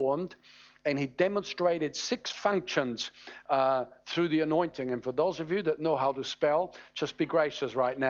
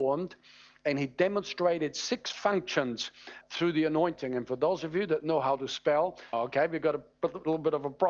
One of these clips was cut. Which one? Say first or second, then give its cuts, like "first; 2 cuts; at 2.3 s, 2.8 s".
second; 2 cuts; at 3.4 s, 6.3 s